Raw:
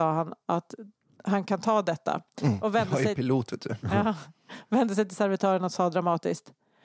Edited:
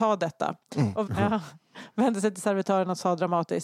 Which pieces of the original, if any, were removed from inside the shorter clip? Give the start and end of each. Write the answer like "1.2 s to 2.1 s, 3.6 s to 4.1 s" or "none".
2.7 s to 3.8 s